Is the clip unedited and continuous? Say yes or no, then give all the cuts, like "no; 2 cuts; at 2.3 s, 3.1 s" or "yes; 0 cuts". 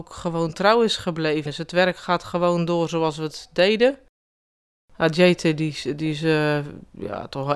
no; 1 cut; at 1.5 s